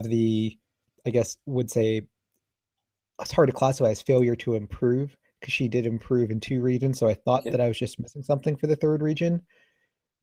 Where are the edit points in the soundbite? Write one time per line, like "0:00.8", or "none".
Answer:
none